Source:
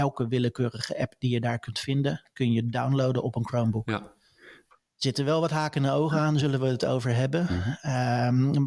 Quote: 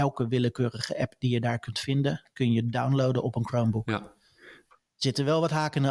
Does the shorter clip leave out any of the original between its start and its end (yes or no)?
no